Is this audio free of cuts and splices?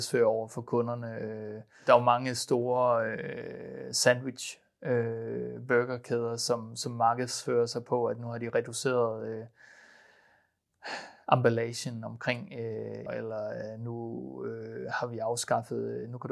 no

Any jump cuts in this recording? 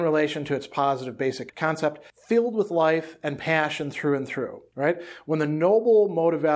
no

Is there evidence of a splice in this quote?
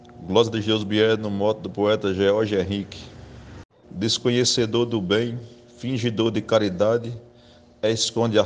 yes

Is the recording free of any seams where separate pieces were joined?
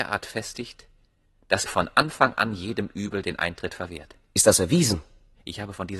no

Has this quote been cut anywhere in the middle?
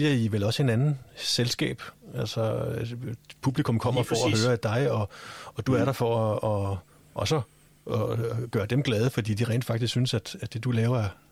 no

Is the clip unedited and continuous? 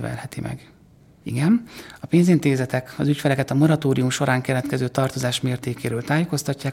no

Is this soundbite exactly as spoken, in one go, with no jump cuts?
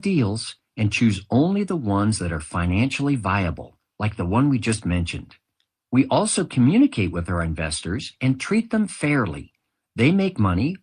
yes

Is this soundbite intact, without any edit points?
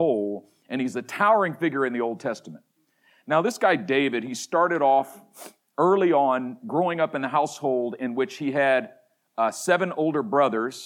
yes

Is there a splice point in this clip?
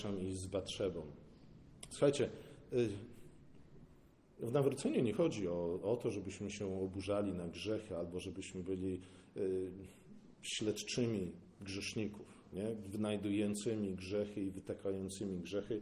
no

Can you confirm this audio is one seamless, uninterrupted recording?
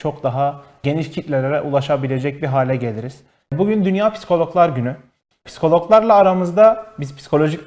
no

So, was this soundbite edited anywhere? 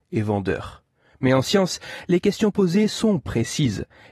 no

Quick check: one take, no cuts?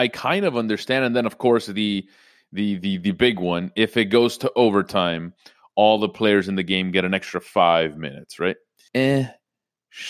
no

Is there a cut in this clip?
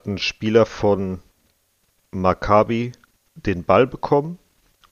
no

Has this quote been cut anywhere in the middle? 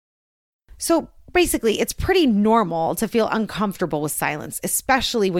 no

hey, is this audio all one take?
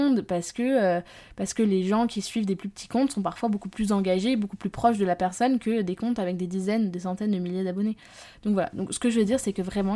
yes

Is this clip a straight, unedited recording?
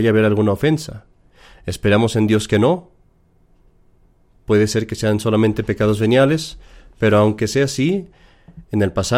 yes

